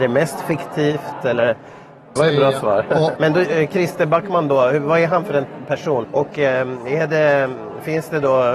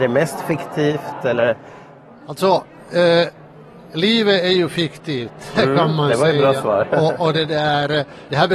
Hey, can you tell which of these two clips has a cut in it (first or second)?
first